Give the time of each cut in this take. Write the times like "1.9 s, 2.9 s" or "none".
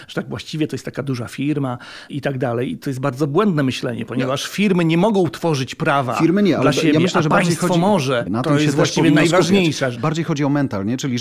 8.3 s, 9.9 s